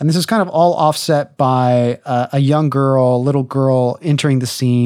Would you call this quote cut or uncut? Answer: uncut